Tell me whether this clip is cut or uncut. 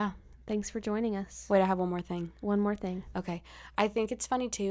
uncut